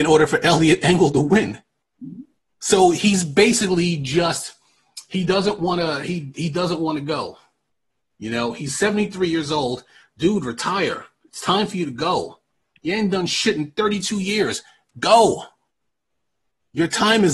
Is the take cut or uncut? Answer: uncut